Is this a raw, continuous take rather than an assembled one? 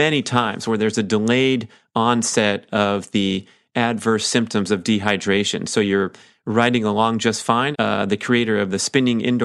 no; 1 cut; at 7.7 s

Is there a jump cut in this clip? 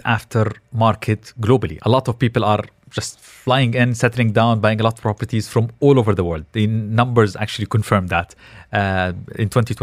no; 0 cuts

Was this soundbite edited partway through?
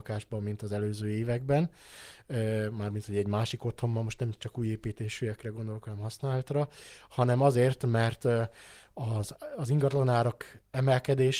no; 0 cuts

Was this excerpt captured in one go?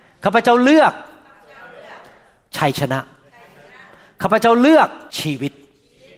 no; 1 cut; at 5.1 s

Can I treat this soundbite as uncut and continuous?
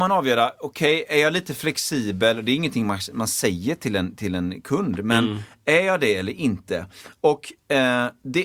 yes; 0 cuts

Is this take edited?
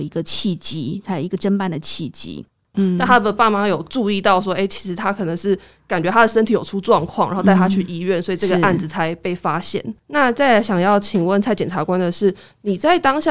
yes; 1 cut; at 2.7 s

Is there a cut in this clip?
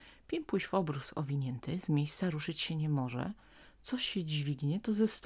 no; 0 cuts

